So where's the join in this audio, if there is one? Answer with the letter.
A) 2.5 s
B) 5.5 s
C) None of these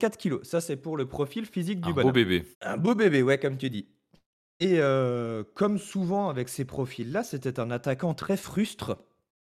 A